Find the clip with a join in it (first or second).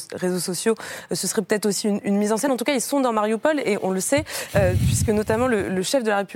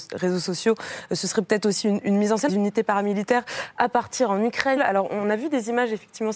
second